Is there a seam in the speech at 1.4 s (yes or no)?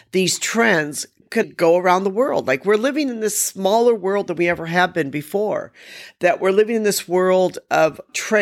yes